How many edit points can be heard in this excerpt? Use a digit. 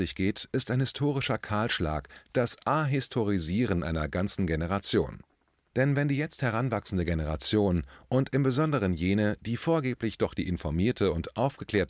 1